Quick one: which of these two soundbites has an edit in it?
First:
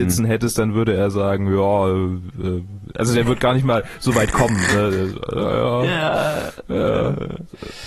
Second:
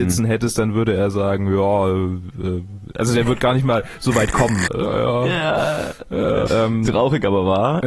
second; 2 cuts; at 4.7 s, 6.5 s

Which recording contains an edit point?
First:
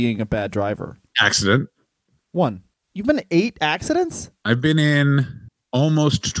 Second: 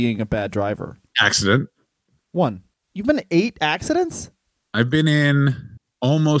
first; 1 cut; at 4.4 s

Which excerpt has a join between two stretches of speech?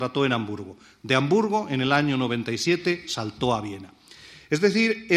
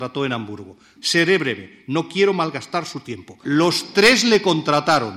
second; 2 cuts; at 1.0 s, 3.4 s

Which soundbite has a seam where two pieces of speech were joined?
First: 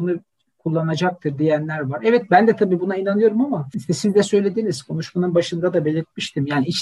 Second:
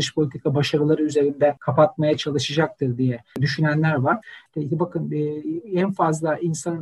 second; 1 cut; at 4.5 s

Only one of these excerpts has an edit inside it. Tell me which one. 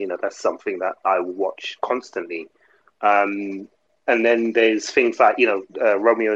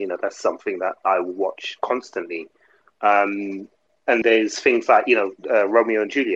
second; 1 cut; at 4.2 s

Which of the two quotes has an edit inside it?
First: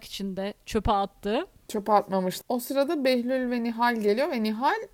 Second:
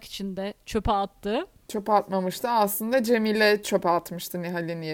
first; 1 cut; at 2.4 s

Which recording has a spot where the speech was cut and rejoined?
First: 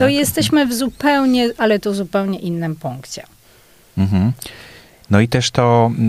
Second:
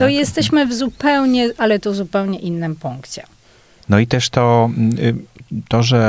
second; 1 cut; at 3.8 s

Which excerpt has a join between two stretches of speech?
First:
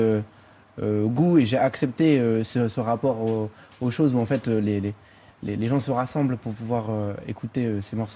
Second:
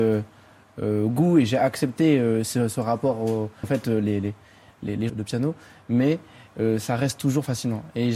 second; 2 cuts; at 3.6 s, 5.1 s

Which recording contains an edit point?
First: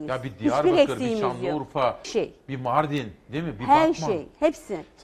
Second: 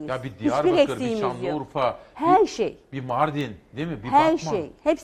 first; 1 cut; at 2.0 s

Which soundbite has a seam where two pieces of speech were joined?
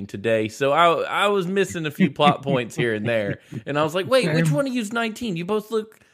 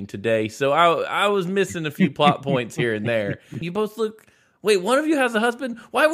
second; 1 cut; at 3.6 s

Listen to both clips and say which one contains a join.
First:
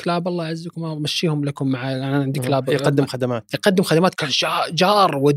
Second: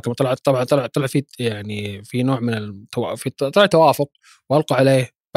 first; 1 cut; at 4.1 s

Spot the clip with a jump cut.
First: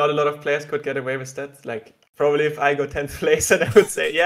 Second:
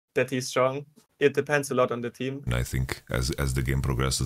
second; 2 cuts; at 1.1 s, 2.5 s

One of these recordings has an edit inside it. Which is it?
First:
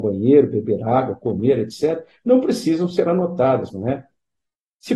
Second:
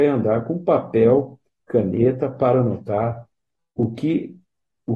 first; 1 cut; at 3.7 s

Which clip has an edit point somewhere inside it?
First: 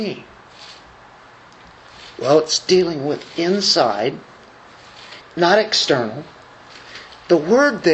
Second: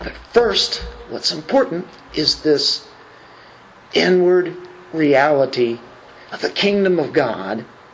first; 1 cut; at 5.2 s

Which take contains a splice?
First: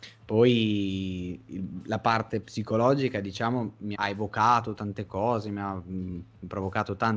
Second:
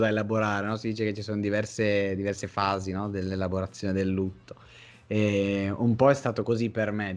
first; 1 cut; at 3.9 s

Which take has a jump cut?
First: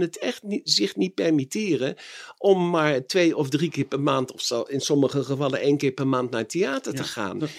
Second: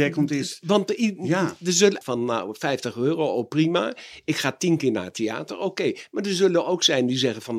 second; 1 cut; at 2.0 s

